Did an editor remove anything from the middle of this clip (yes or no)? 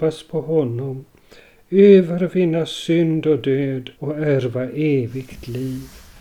yes